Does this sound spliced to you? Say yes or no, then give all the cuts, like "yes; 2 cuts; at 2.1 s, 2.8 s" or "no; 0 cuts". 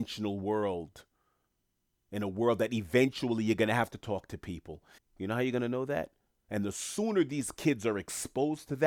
yes; 2 cuts; at 5.0 s, 6.4 s